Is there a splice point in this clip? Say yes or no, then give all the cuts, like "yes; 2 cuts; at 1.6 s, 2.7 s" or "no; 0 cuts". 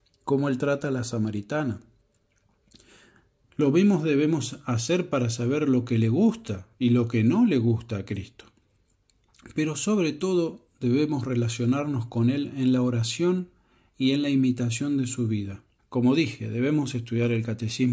yes; 2 cuts; at 3.4 s, 15.8 s